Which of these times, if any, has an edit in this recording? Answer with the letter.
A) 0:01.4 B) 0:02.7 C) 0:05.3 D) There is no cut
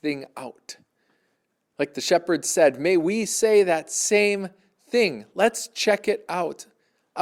D